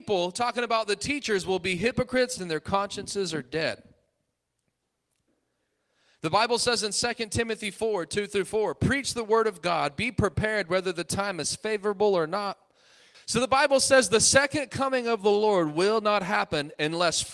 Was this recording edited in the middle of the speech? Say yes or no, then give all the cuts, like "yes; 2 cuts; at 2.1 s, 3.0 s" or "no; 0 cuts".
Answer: yes; 2 cuts; at 2.4 s, 13.1 s